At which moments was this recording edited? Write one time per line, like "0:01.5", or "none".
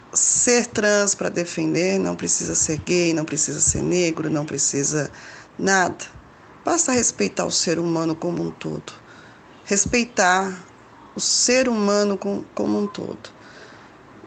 none